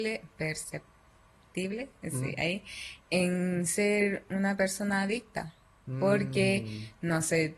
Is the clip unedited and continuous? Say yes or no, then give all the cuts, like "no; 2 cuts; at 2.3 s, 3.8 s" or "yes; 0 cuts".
no; 1 cut; at 3.0 s